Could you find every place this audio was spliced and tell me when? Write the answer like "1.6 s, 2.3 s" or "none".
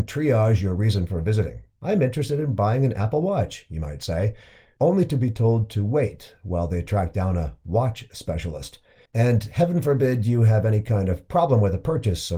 9.1 s